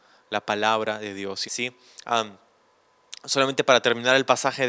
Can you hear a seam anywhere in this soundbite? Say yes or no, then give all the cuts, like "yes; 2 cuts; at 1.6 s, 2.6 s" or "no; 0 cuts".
yes; 1 cut; at 1.4 s